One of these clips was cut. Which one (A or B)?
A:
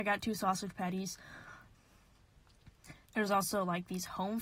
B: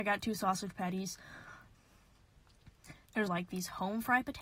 B